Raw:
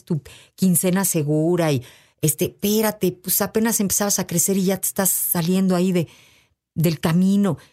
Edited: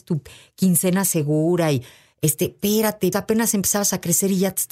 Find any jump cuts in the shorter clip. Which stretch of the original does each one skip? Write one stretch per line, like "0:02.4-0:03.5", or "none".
0:03.1-0:03.4